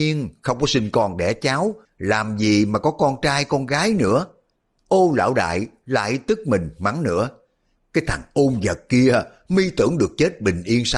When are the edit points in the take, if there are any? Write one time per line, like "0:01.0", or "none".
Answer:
none